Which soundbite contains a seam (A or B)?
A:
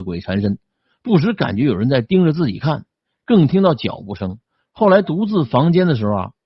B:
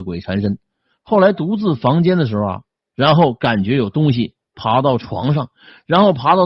B